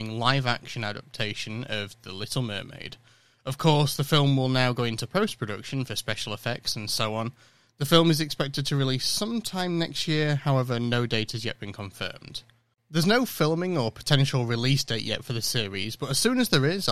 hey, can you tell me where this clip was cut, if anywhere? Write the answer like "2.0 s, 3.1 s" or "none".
12.7 s